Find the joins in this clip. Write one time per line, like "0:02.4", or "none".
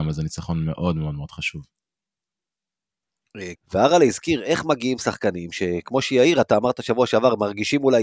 0:03.5